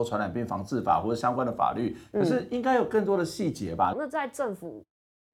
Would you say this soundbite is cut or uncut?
cut